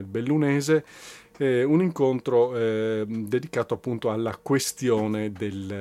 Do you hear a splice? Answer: no; 0 cuts

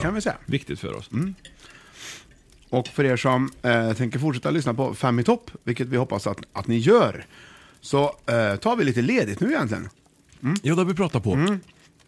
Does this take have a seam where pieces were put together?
no; 0 cuts

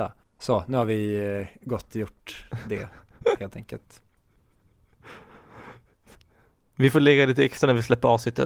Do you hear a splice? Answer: no; 0 cuts

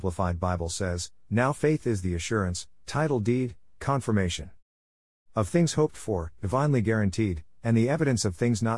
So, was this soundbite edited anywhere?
no; 0 cuts

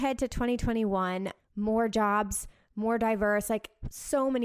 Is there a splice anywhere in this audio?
yes; 1 cut; at 1.4 s

